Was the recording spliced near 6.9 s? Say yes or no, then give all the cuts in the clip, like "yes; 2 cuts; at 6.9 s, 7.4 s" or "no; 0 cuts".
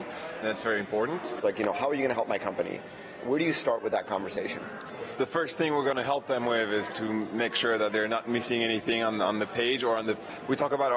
yes; 2 cuts; at 1.4 s, 6.9 s